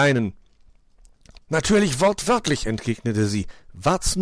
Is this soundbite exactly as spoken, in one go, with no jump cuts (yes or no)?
no